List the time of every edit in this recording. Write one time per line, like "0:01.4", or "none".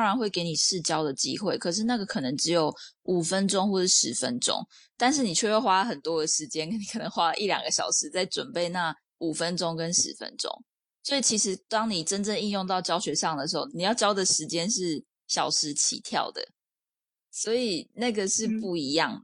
0:13.7